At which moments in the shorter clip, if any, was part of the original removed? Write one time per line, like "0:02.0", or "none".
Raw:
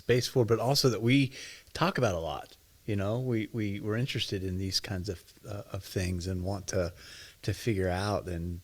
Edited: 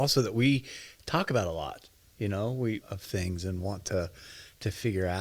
0:02.8